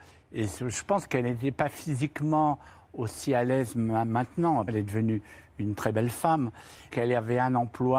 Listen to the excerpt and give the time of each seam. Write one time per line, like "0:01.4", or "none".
0:04.7
0:06.9